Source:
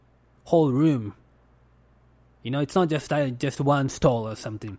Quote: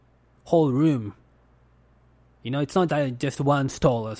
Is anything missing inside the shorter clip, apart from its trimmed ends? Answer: yes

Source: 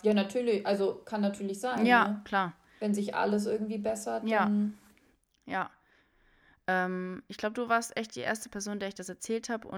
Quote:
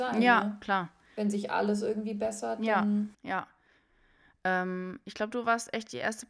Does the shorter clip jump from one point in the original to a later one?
yes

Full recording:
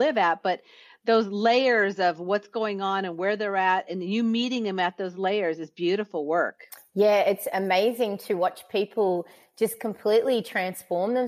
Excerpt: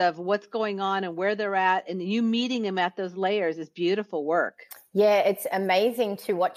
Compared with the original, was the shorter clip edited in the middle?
no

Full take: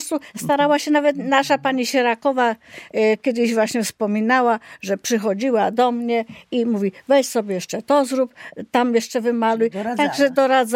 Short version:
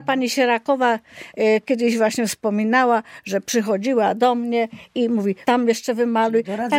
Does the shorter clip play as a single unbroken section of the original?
no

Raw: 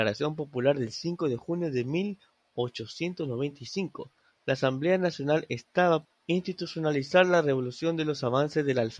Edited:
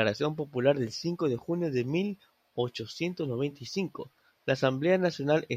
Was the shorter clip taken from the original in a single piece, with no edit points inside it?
yes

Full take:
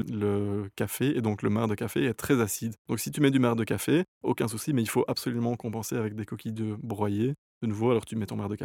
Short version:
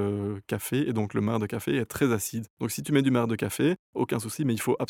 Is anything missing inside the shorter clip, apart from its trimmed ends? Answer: no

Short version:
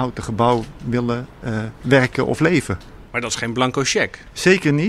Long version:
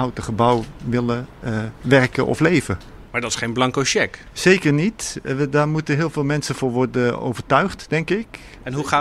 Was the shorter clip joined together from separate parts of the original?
no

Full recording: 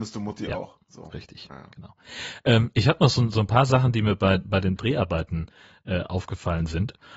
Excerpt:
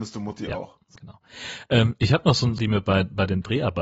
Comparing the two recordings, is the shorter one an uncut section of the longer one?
no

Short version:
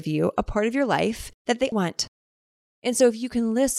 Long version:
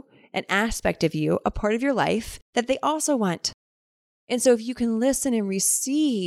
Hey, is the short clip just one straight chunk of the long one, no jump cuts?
no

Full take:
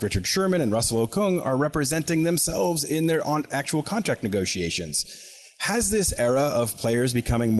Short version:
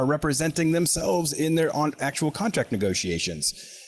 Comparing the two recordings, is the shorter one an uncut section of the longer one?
yes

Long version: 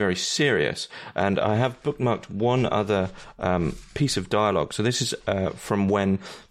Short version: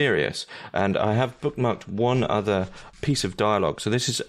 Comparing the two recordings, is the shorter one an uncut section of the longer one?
no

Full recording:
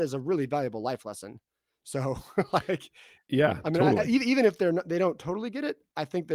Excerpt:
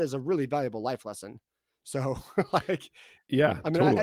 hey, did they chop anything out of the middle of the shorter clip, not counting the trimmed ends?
no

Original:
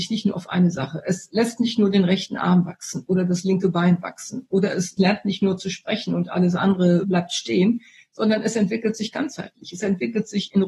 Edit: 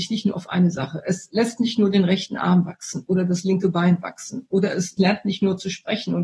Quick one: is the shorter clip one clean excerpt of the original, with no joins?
yes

